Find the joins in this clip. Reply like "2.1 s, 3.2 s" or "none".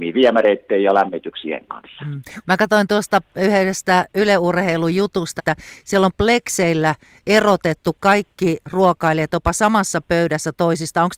2.4 s, 5.4 s